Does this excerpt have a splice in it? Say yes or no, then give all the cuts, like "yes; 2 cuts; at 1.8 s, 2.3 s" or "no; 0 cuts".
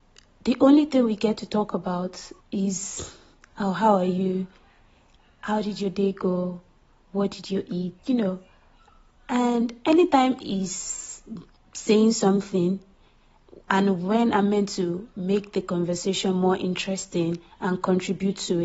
yes; 2 cuts; at 2.4 s, 8.0 s